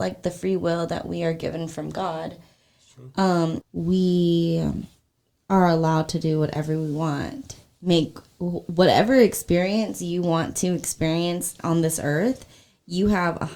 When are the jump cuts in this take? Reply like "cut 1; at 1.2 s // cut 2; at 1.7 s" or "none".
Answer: cut 1; at 3.6 s